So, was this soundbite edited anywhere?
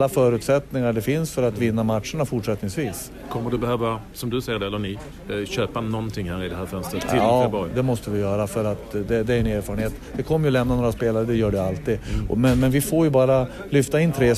no; 0 cuts

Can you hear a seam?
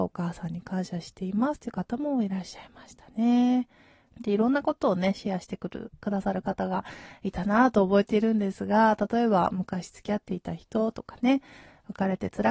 yes; 1 cut; at 4.1 s

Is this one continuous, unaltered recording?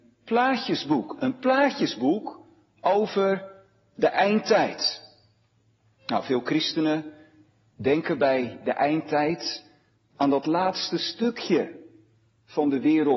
yes; 0 cuts

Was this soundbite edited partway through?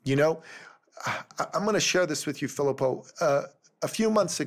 no; 0 cuts

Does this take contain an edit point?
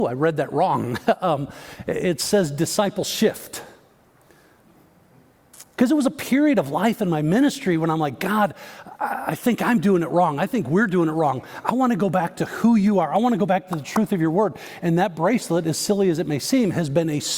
no; 0 cuts

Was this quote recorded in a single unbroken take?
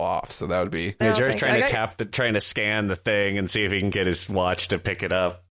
no; 1 cut; at 1.0 s

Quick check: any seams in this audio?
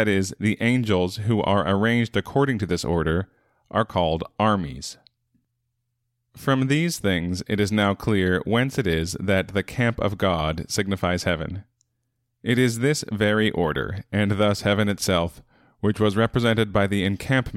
no; 0 cuts

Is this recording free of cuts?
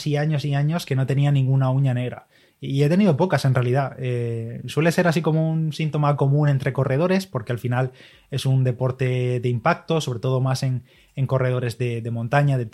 yes; 0 cuts

